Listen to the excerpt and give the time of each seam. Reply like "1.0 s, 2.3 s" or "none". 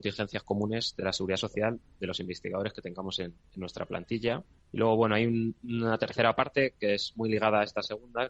4.6 s